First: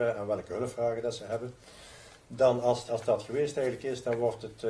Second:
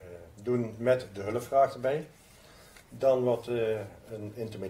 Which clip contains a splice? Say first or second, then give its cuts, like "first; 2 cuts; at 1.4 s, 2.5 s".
first; 1 cut; at 2.9 s